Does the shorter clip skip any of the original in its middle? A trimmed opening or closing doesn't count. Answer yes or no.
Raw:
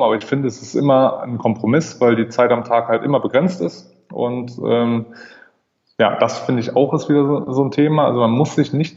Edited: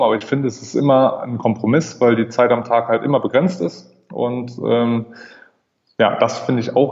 no